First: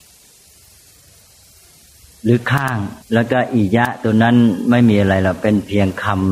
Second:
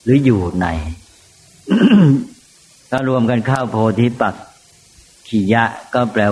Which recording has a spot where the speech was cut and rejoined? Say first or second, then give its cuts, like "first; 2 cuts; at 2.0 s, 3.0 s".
first; 1 cut; at 3.0 s